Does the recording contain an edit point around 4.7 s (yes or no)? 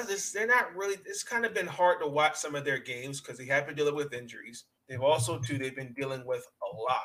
yes